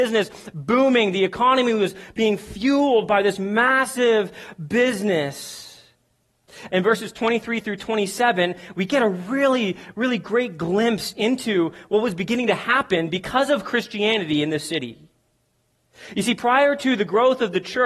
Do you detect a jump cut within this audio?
yes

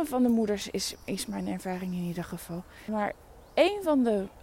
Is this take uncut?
no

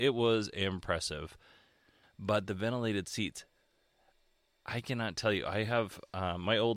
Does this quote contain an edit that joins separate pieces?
yes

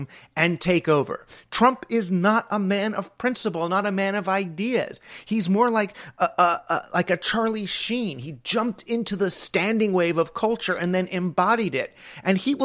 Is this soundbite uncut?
yes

